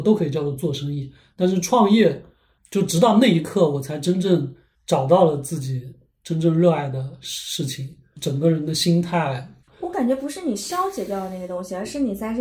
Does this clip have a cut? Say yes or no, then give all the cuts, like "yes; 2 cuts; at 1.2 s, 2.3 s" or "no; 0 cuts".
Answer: yes; 2 cuts; at 2.6 s, 9.7 s